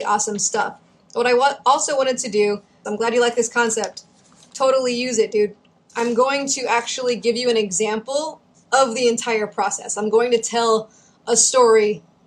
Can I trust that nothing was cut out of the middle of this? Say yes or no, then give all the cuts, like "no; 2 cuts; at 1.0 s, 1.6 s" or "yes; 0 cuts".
no; 1 cut; at 2.8 s